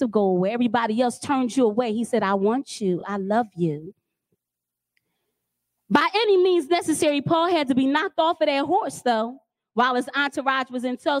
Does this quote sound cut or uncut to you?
uncut